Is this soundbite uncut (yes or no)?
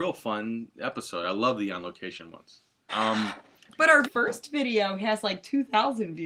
no